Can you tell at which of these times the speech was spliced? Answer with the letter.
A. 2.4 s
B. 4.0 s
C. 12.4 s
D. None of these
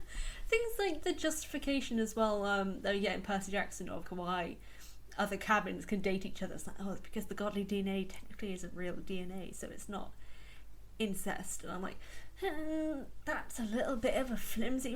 B